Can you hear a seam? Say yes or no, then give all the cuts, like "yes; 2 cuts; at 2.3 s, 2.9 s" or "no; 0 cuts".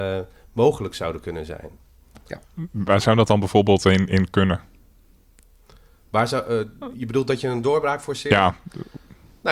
no; 0 cuts